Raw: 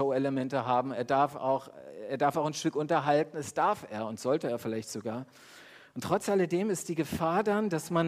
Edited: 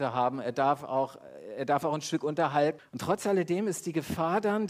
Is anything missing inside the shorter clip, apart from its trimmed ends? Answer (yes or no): yes